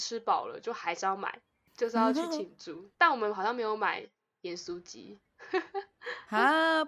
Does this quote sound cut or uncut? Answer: cut